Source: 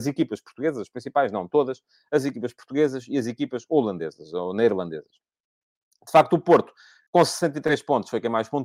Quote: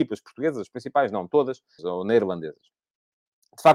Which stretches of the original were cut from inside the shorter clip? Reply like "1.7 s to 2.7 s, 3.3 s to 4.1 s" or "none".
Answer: 2.0 s to 4.3 s